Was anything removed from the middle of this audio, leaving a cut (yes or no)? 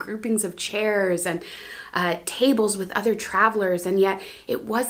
no